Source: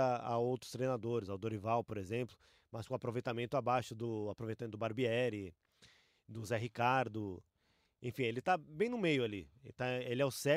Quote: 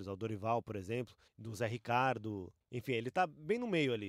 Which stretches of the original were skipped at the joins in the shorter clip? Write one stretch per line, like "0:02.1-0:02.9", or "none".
0:02.5-0:06.2
0:07.5-0:07.9